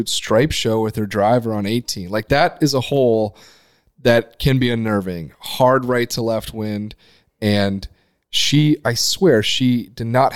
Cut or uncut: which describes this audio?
uncut